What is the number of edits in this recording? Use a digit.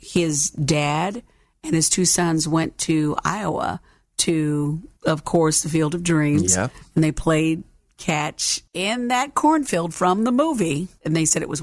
1